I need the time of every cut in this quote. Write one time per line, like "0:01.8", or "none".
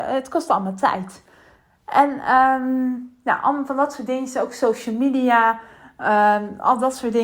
none

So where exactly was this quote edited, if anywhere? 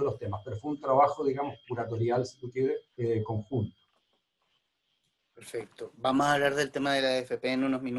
0:02.9

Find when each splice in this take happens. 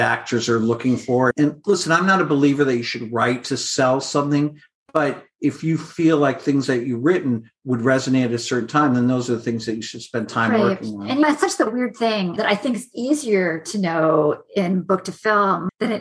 none

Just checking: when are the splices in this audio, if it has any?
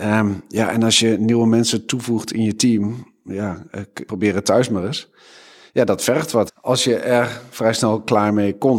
0:04.1
0:06.5

